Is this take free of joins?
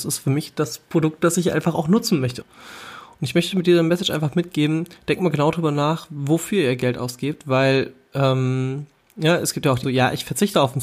no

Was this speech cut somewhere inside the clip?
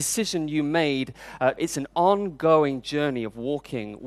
yes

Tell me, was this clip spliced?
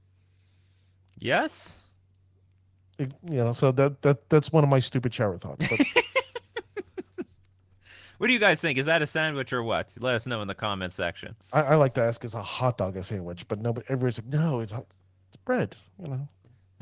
no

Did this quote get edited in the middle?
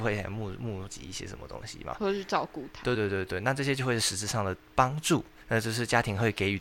yes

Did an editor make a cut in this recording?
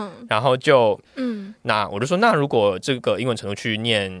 yes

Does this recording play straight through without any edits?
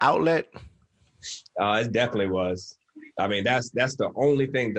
yes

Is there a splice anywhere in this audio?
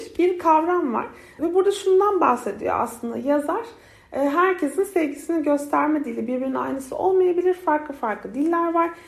no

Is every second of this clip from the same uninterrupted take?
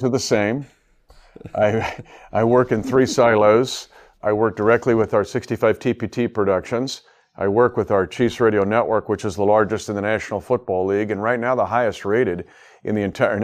yes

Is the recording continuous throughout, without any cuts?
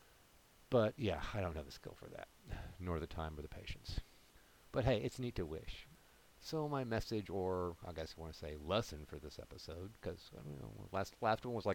yes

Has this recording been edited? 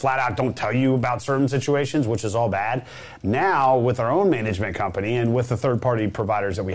no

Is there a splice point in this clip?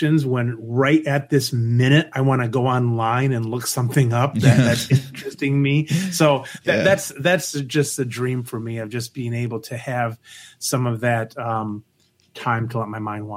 no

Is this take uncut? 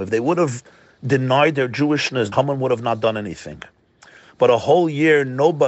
no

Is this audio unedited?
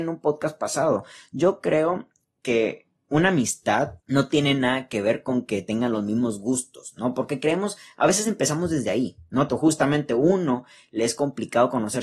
no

